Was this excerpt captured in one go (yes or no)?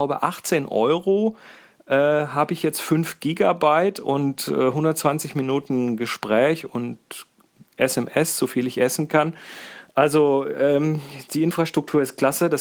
yes